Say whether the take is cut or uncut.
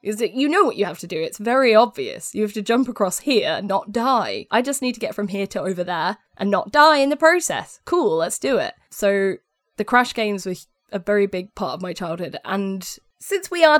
cut